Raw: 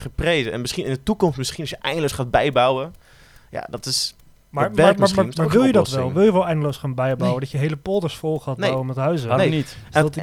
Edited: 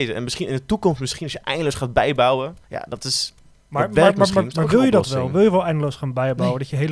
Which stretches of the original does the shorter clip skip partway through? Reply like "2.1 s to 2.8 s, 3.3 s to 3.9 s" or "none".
3.0 s to 3.4 s